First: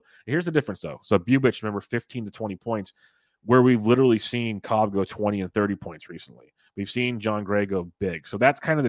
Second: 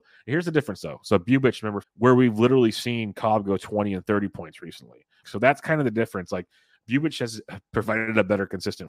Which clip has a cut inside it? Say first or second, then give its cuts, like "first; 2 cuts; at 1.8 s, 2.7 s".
second; 2 cuts; at 1.8 s, 5.2 s